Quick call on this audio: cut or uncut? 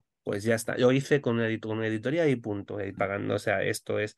cut